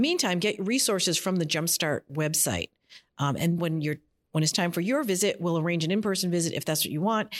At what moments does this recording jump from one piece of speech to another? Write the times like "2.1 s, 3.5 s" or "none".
3.6 s